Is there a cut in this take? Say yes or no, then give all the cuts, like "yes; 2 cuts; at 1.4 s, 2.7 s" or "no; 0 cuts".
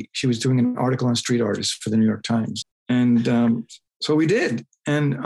yes; 1 cut; at 2.6 s